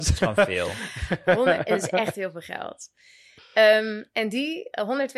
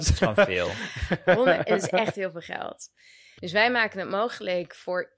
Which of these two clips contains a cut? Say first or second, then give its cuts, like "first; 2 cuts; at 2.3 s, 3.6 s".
second; 1 cut; at 3.4 s